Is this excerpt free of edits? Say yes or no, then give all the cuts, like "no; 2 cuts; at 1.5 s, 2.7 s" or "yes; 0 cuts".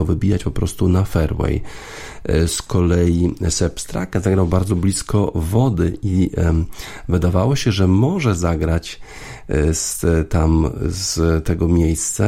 yes; 0 cuts